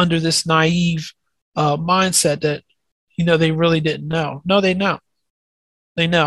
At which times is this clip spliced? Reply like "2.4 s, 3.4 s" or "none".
none

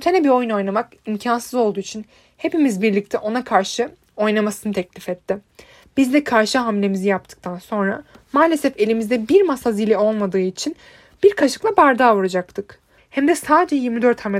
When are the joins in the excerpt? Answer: 5.8 s, 13.0 s

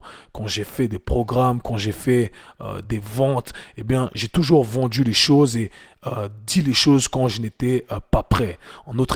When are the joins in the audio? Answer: none

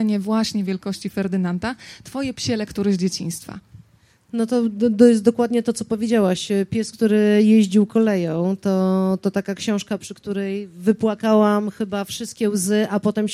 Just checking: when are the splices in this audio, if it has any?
none

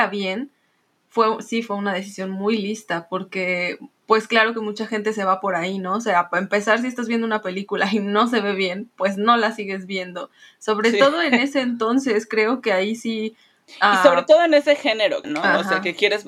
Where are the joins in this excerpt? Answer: 15.2 s

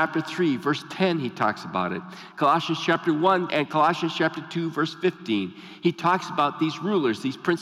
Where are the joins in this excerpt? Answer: 3.5 s

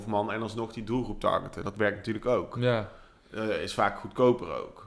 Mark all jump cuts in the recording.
none

